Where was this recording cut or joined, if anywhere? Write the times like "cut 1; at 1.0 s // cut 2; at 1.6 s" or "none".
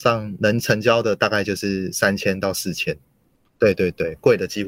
cut 1; at 3.4 s